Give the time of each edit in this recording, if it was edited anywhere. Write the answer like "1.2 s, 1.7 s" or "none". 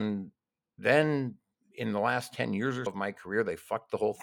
2.9 s